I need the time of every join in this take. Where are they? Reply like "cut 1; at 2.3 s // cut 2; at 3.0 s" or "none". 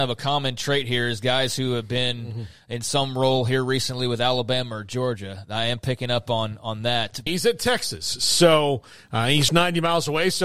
cut 1; at 7.3 s // cut 2; at 9.5 s